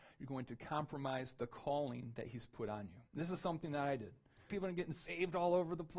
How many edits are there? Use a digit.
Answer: 2